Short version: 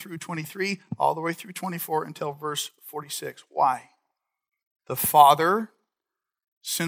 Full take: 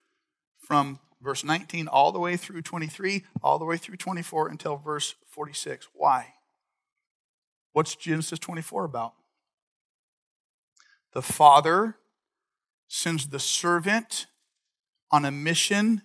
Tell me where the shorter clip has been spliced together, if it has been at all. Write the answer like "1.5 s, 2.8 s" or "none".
4.8 s